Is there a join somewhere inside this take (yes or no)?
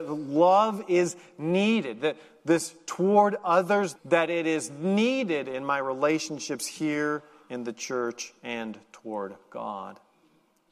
yes